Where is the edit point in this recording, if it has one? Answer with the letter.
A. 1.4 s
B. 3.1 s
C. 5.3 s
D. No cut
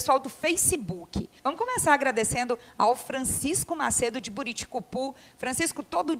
A